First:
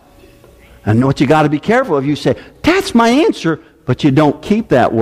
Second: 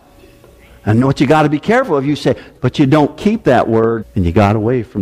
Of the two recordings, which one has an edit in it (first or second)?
second